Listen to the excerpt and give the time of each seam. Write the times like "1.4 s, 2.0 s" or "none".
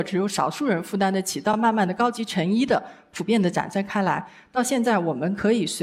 none